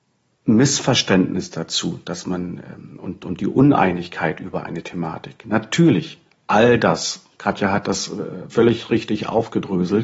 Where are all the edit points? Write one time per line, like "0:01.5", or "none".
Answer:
0:08.5